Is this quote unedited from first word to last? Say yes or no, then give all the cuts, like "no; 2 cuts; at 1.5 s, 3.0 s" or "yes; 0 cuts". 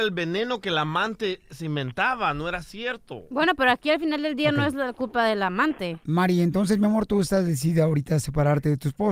yes; 0 cuts